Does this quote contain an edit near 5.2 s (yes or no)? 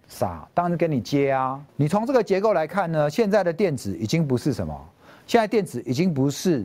no